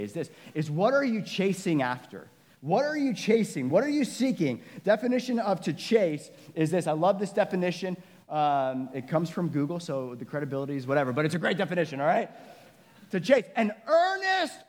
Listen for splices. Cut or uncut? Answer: uncut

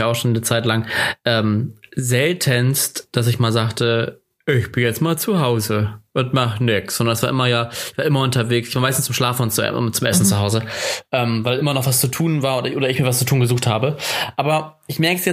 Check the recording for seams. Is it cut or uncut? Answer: cut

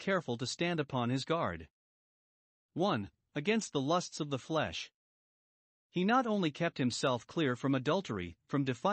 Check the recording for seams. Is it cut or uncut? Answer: uncut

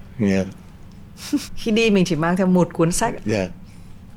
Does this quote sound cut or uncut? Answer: cut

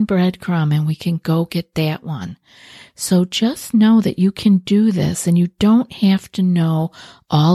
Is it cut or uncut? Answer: uncut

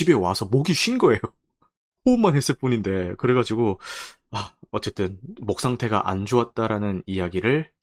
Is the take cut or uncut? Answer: uncut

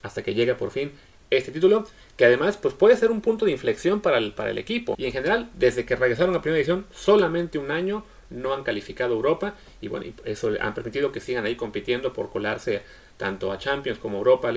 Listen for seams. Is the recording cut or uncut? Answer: cut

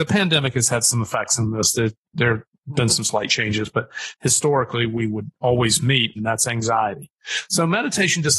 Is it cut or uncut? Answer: cut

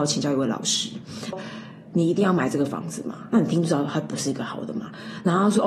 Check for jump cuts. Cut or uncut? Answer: cut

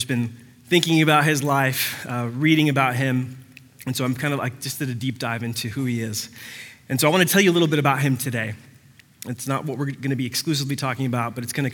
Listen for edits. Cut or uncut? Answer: uncut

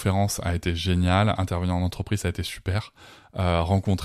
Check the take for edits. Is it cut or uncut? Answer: uncut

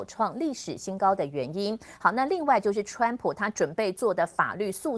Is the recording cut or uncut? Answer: uncut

